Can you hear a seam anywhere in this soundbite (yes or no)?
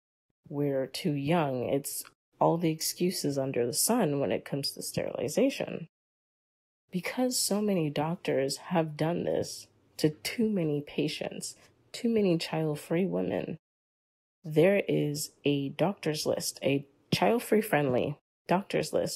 no